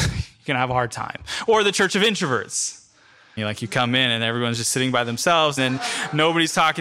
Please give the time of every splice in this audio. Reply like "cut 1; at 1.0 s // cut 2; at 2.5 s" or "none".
cut 1; at 3.4 s // cut 2; at 5.6 s